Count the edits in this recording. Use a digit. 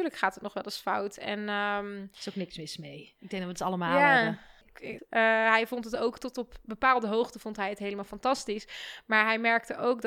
1